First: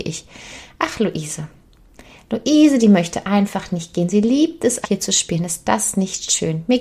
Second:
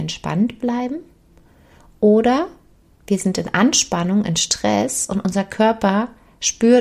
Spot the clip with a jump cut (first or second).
first